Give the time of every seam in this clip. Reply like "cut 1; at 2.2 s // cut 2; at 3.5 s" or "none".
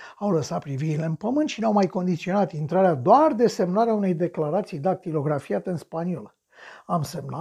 none